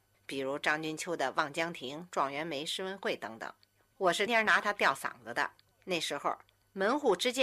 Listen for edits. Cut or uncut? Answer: cut